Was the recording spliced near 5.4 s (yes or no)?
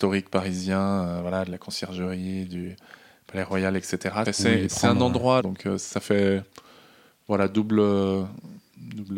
yes